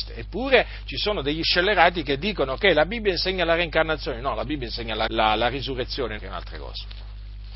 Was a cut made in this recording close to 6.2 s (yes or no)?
yes